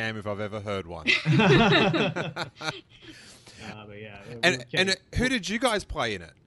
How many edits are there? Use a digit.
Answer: 0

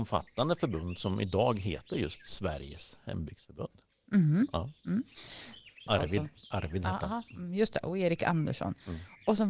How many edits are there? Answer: 1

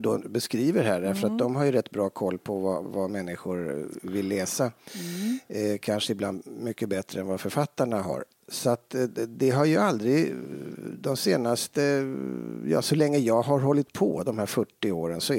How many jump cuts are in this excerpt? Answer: 1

